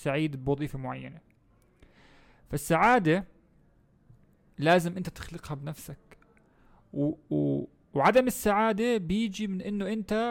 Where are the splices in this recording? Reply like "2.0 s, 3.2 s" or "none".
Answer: none